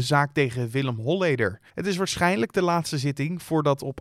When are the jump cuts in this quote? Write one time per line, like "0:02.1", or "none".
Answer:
0:01.7

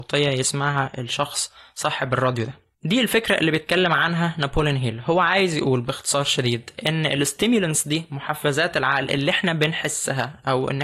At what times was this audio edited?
0:02.7

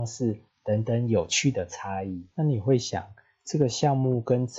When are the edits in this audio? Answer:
0:02.3

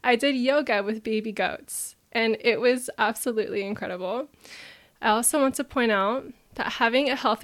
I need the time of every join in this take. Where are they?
0:04.9

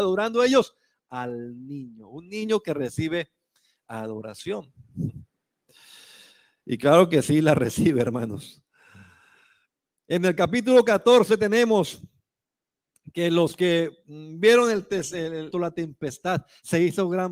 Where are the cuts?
0:15.5

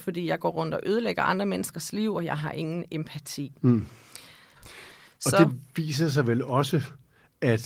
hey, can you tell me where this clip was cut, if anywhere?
0:04.5

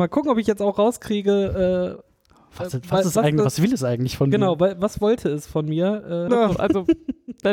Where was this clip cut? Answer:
0:06.3

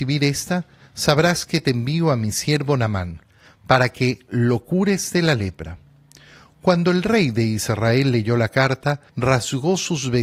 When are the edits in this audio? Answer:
0:09.1

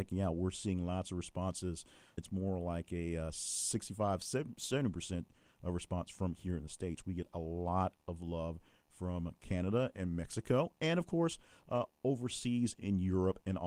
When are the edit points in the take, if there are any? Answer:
0:02.2

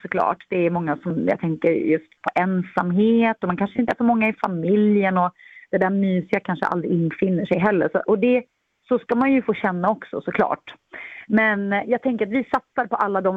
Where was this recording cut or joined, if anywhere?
none

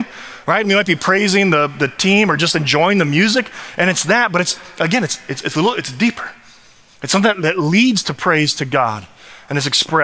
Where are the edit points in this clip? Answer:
none

